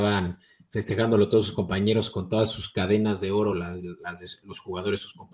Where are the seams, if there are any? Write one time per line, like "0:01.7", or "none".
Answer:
none

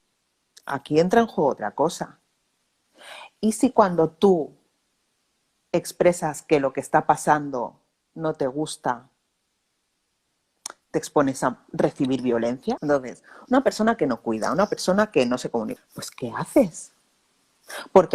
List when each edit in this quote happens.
0:12.8
0:15.8

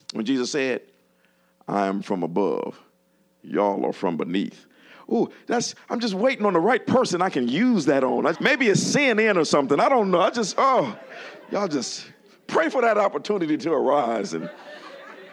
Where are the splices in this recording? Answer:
0:08.3

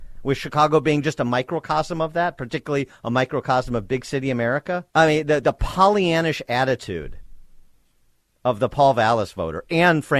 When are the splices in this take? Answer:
0:04.9

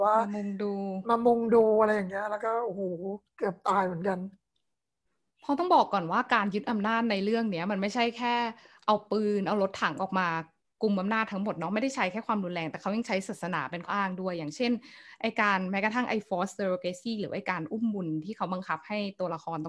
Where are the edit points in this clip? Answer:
0:13.9

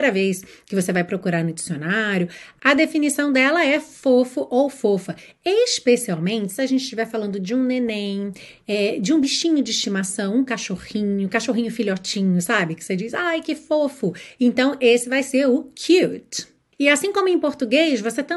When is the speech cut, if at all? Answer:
none

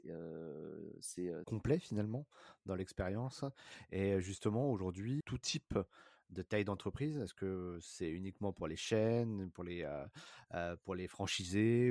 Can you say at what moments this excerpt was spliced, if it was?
0:01.4
0:05.2

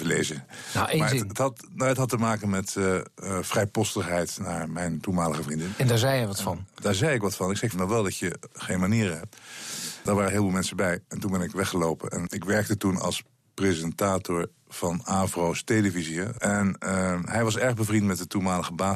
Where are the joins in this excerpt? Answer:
0:07.7

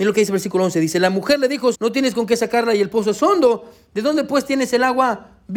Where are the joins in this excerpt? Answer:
0:01.7

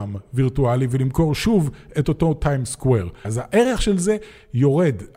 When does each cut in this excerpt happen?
0:03.2

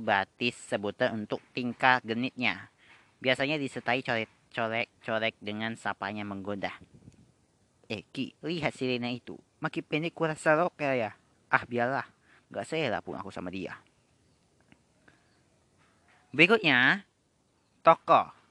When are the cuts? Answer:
0:08.4
0:11.3

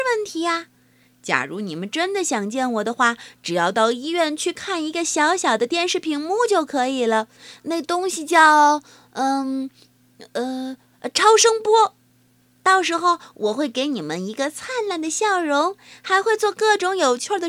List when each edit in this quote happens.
none

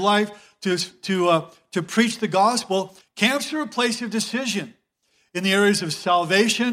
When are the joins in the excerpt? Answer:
0:03.0

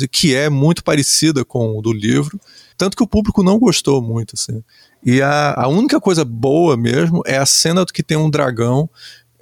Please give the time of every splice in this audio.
0:02.7
0:05.6

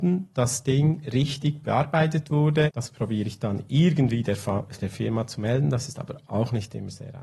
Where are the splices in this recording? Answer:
0:02.7

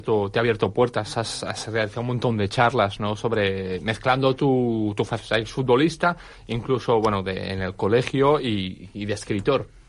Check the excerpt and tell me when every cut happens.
none

